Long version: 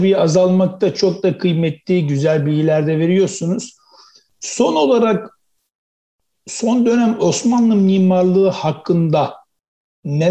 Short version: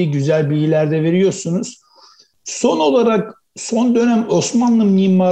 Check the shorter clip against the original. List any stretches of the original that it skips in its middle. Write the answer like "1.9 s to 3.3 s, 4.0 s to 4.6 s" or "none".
5.4 s to 6.4 s